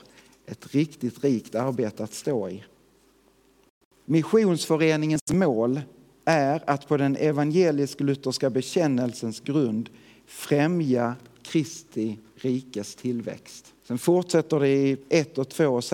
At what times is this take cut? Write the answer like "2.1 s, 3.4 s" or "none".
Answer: 4.0 s, 13.8 s